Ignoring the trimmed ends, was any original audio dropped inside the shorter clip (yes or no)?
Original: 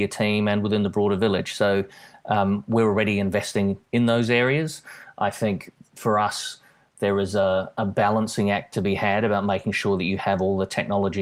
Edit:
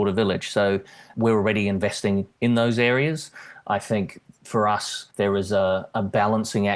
yes